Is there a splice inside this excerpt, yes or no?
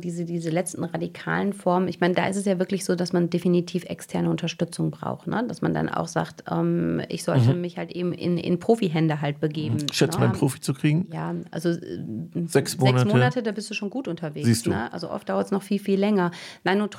yes